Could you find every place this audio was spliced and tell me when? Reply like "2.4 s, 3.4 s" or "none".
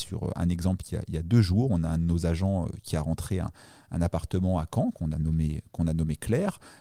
none